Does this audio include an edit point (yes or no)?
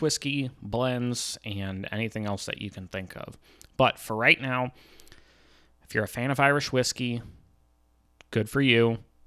no